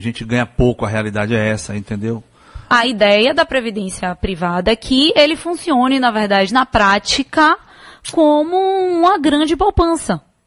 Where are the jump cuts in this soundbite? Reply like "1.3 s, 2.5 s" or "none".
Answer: 2.7 s